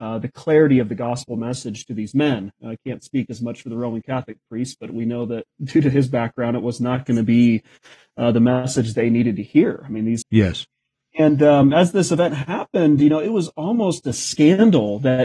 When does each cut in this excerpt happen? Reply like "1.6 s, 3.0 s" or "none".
10.2 s